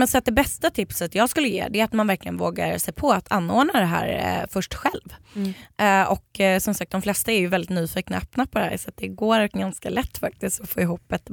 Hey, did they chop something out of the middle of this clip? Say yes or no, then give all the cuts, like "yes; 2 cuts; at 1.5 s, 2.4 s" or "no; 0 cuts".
no; 0 cuts